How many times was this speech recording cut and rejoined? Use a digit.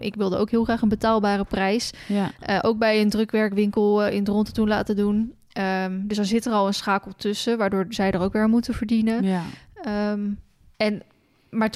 0